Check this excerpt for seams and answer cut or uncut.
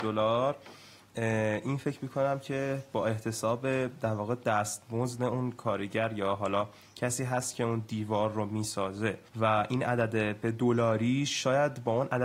cut